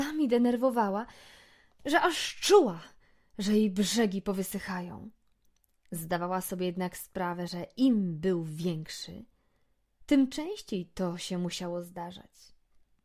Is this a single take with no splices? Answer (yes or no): yes